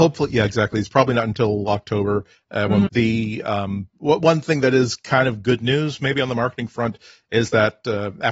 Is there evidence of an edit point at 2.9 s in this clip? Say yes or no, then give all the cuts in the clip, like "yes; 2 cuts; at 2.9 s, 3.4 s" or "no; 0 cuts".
yes; 1 cut; at 2.9 s